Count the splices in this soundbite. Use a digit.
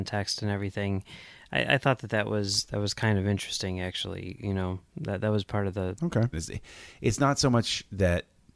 1